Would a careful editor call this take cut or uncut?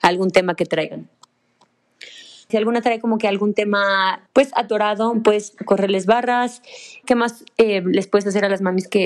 cut